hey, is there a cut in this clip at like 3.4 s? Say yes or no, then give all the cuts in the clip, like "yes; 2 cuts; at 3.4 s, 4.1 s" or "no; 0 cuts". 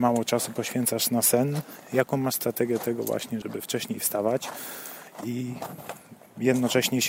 yes; 1 cut; at 3.4 s